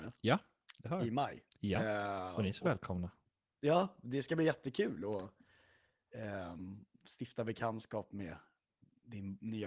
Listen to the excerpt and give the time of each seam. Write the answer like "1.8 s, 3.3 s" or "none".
none